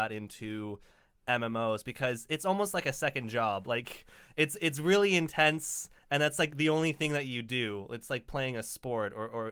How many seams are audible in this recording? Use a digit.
0